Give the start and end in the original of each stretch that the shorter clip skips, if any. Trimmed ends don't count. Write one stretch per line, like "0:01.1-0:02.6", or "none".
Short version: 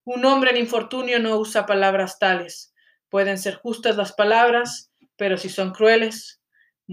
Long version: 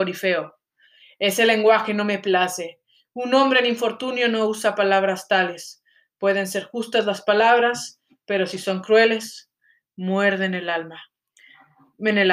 none